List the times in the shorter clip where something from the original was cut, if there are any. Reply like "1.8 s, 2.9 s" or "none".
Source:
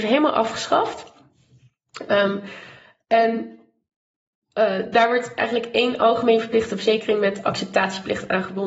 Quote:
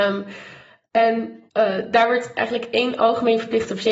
1.5 s